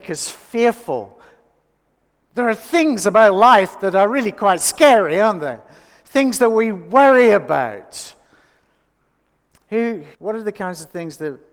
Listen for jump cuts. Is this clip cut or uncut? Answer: cut